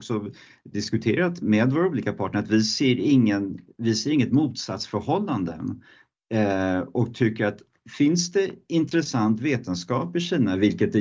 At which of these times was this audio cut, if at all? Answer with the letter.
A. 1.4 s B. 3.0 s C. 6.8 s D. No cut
A